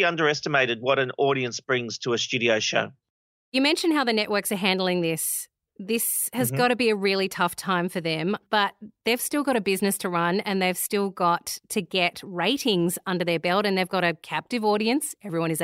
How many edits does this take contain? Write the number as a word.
zero